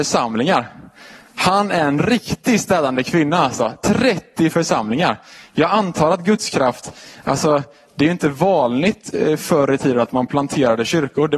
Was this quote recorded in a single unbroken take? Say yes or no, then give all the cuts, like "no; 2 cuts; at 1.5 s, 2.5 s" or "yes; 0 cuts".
yes; 0 cuts